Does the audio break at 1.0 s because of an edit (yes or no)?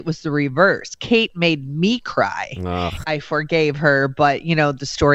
no